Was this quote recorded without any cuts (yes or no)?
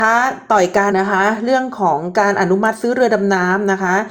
no